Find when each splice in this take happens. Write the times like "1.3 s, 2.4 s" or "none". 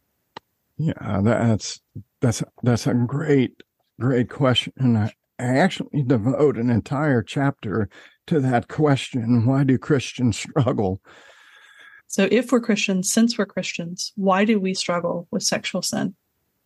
12.0 s, 14.7 s

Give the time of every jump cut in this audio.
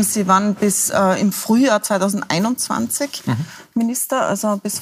none

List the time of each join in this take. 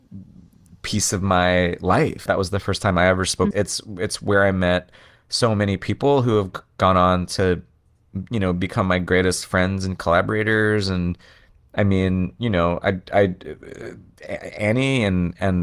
2.3 s, 3.5 s

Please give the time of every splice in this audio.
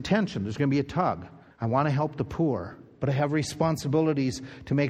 1.5 s

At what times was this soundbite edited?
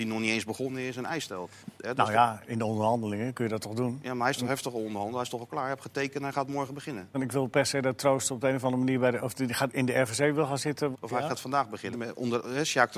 7.1 s, 10.9 s, 11.9 s

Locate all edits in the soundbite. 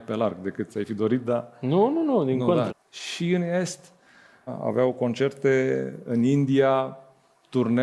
2.7 s, 4.5 s

